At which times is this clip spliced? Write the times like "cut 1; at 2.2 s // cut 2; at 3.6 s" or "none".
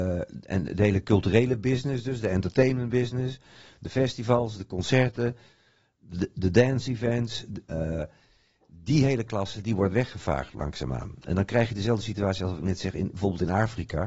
cut 1; at 7.6 s